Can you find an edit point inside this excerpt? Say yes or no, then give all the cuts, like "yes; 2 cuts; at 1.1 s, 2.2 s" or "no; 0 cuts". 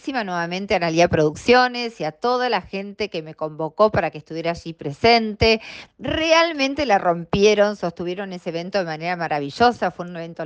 yes; 1 cut; at 5.9 s